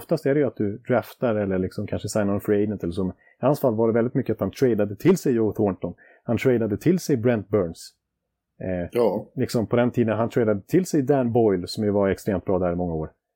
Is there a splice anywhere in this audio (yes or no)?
no